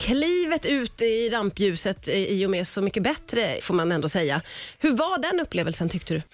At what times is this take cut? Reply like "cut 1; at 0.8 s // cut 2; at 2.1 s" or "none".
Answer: cut 1; at 3.6 s